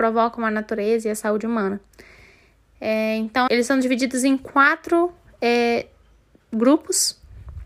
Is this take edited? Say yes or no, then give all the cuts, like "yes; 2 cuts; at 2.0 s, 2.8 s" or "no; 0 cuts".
yes; 1 cut; at 3.5 s